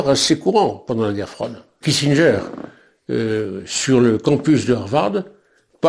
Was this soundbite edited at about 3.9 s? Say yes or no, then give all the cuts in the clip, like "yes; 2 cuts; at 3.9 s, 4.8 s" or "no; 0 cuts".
no; 1 cut; at 1.8 s